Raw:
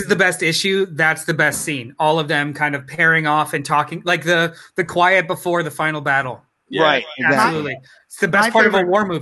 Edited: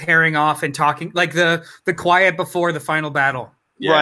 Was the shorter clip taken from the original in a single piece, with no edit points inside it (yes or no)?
yes